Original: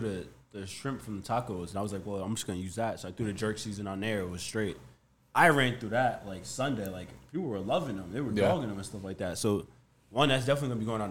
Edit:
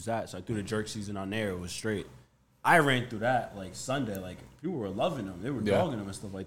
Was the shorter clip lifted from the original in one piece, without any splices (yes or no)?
yes